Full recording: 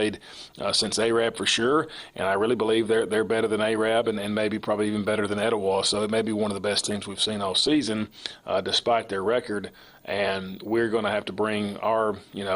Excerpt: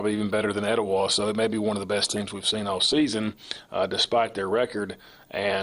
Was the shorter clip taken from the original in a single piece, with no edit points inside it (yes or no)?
yes